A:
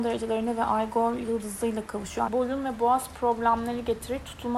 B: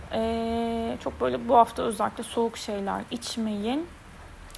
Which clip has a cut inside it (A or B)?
A